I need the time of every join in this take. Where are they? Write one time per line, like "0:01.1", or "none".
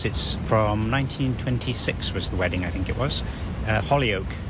0:02.3